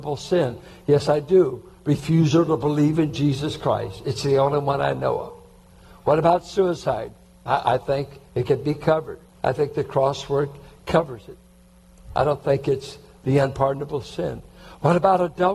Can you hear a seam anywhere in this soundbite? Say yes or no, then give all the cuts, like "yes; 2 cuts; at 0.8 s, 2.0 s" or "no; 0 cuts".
yes; 1 cut; at 9.3 s